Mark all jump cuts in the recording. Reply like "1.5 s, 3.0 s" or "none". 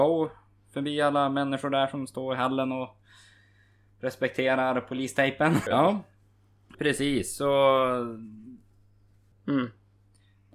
5.7 s, 6.7 s, 9.3 s